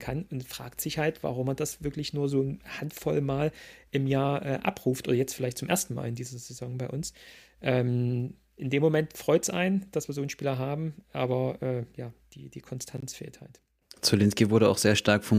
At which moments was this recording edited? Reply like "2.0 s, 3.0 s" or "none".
none